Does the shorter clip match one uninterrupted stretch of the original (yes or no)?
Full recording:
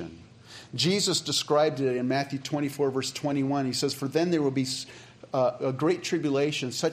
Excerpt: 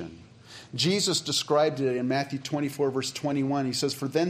yes